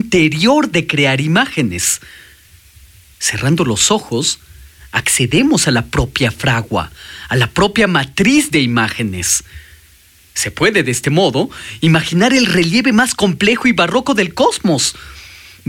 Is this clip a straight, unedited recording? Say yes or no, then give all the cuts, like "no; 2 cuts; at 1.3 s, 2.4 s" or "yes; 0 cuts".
yes; 0 cuts